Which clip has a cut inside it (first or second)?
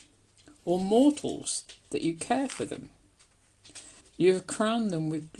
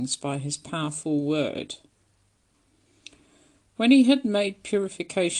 first